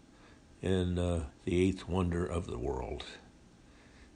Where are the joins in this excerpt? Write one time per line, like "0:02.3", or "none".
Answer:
0:01.3